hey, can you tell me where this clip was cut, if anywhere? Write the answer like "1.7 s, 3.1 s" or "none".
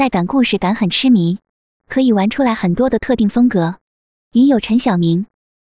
1.8 s